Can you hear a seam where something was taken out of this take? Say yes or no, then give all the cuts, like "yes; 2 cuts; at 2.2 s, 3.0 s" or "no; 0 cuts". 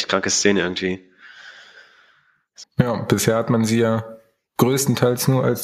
yes; 1 cut; at 2.6 s